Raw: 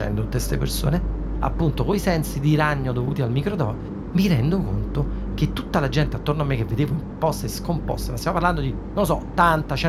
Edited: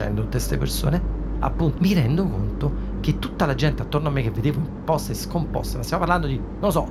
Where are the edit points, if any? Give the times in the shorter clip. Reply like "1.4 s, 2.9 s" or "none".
1.8 s